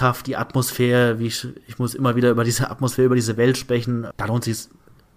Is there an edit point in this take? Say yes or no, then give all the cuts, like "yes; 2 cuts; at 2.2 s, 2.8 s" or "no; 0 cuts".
yes; 1 cut; at 4.1 s